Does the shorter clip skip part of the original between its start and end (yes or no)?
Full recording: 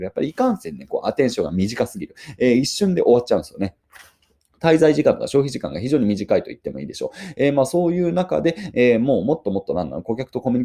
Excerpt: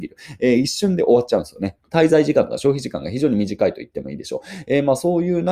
yes